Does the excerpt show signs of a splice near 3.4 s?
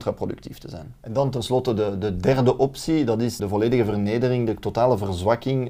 yes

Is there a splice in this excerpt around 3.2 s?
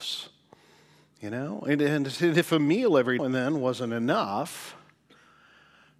yes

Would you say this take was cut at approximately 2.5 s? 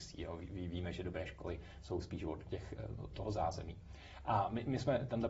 yes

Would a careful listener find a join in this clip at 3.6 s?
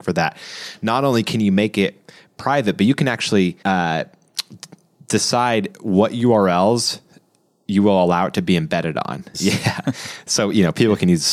yes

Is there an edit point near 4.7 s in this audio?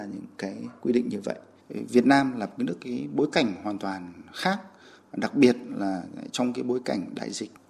no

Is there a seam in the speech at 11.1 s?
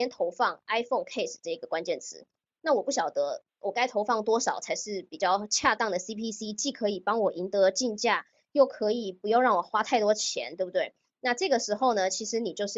no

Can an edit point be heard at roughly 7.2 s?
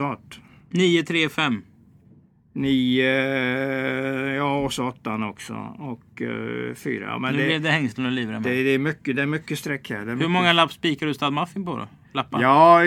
no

